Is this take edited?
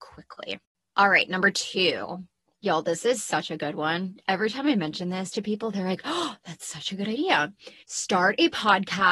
yes; 1 cut; at 7.8 s

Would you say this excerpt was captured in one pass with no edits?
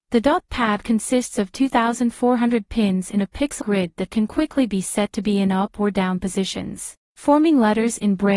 no; 1 cut; at 3.6 s

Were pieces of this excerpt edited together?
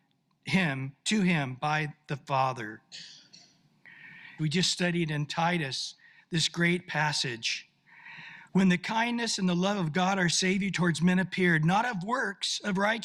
yes; 2 cuts; at 4.4 s, 8.5 s

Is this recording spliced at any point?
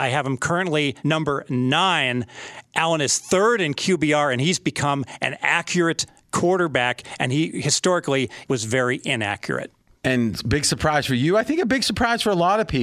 yes; 2 cuts; at 1.0 s, 8.4 s

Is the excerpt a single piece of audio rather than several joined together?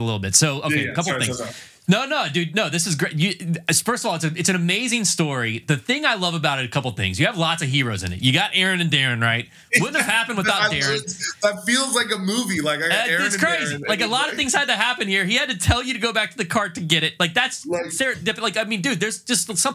yes; 0 cuts

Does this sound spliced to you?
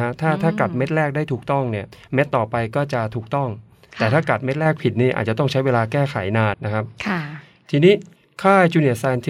yes; 1 cut; at 6.5 s

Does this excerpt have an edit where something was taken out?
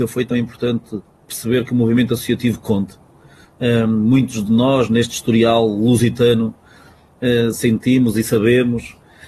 no; 0 cuts

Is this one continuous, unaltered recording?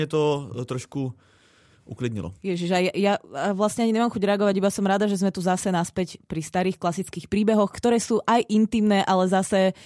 yes; 0 cuts

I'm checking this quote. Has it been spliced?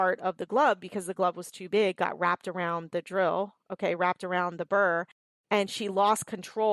no; 0 cuts

